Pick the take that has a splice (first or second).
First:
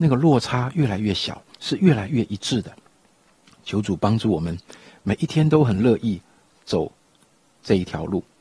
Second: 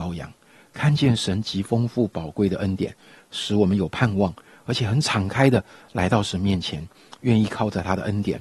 first